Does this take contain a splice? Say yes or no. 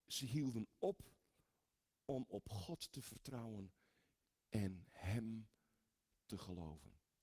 no